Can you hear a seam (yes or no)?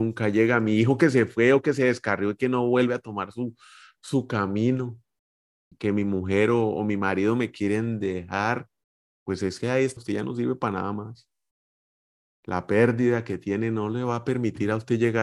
yes